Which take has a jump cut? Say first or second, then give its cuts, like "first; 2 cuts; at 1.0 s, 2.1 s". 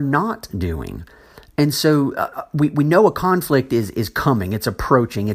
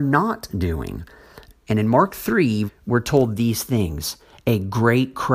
second; 2 cuts; at 1.5 s, 2.7 s